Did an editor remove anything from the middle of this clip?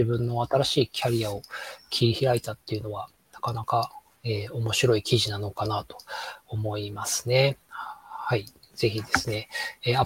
no; 0 cuts

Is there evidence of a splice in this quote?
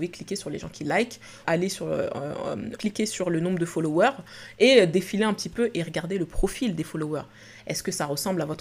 yes; 2 cuts; at 1.4 s, 2.8 s

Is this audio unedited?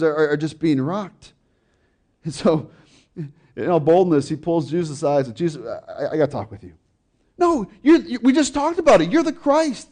no; 1 cut; at 7.2 s

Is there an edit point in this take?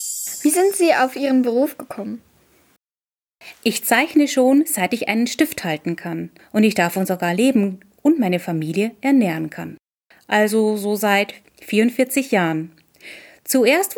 yes; 2 cuts; at 6.4 s, 10.1 s

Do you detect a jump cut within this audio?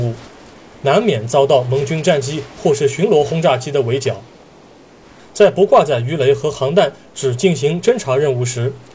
yes; 1 cut; at 5.2 s

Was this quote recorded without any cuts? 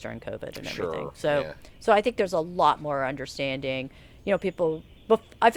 yes; 0 cuts

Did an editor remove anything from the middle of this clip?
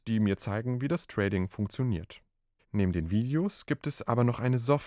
no; 0 cuts

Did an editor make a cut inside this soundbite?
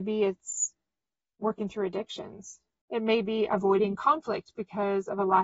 yes; 1 cut; at 2.8 s

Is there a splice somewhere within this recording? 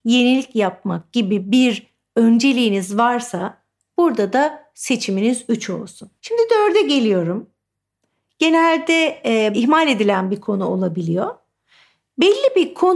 yes; 2 cuts; at 6.2 s, 9.5 s

